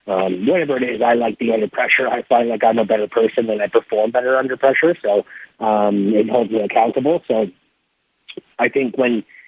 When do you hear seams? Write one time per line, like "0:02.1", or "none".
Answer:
none